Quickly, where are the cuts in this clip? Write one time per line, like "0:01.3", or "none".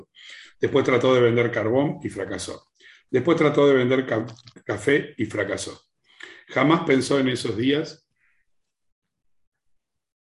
none